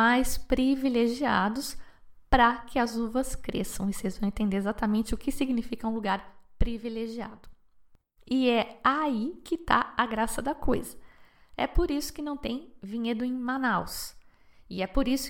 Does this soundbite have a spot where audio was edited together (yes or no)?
yes